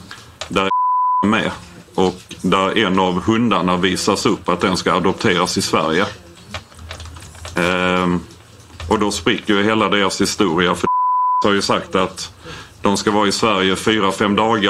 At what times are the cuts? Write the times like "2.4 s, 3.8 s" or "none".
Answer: none